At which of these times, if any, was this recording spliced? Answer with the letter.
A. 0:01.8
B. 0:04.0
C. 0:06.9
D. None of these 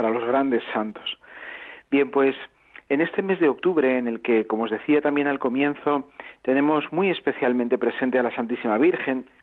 D